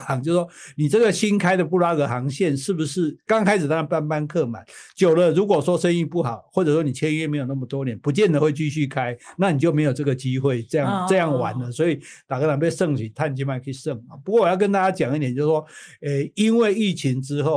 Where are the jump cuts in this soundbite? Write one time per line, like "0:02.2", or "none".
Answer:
none